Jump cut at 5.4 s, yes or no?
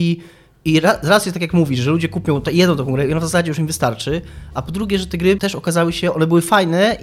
yes